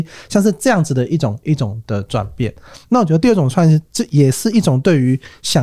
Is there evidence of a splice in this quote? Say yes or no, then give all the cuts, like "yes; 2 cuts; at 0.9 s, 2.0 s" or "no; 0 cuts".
no; 0 cuts